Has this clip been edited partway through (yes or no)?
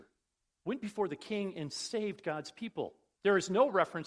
yes